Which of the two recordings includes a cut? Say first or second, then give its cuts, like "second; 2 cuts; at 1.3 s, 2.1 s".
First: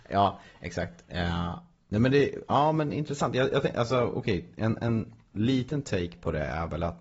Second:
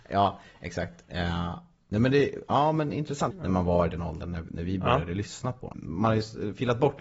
second; 2 cuts; at 3.3 s, 5.7 s